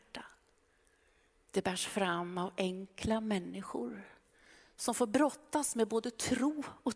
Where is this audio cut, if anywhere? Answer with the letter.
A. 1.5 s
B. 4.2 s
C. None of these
A